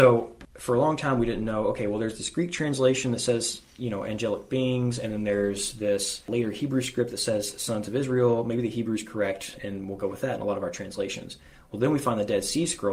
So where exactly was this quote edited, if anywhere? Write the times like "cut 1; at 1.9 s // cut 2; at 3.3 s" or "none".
none